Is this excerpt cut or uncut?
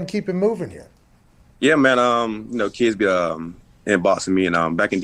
uncut